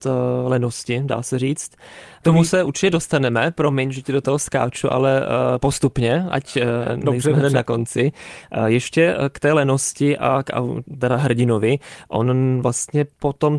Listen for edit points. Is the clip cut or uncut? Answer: cut